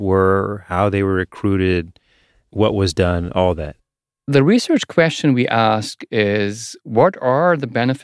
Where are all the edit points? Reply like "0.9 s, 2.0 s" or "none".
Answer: none